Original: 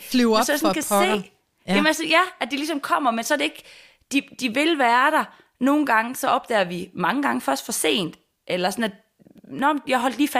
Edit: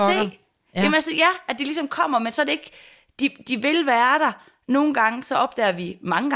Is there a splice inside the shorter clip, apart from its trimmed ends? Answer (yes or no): no